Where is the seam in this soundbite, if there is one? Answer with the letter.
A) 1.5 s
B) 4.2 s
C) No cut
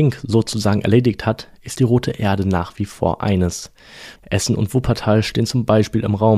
B